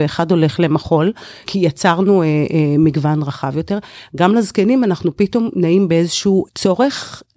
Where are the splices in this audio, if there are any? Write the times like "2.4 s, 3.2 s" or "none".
1.4 s